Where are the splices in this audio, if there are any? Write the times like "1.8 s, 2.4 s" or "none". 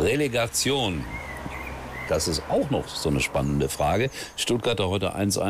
2.1 s